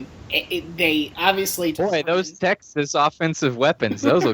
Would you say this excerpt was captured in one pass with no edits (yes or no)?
yes